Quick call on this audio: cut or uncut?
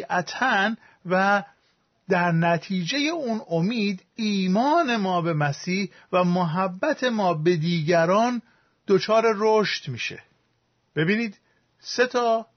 uncut